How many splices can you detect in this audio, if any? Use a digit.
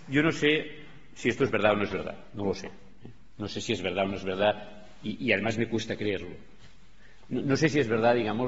0